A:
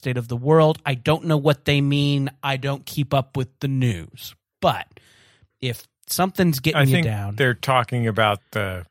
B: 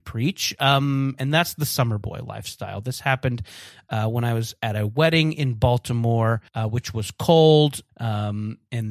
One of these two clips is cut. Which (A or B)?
B